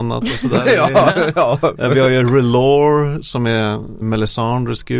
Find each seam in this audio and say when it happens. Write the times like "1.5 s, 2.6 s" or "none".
4.0 s